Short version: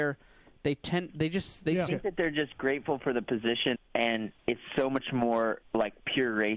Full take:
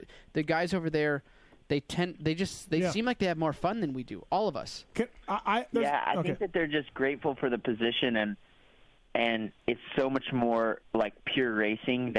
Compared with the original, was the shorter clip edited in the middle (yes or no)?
yes